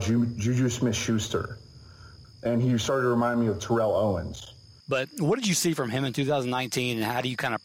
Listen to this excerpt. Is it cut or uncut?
cut